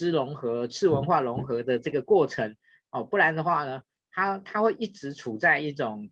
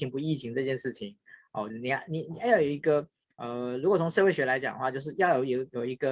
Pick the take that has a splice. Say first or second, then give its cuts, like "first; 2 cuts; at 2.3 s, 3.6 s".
second; 1 cut; at 1.7 s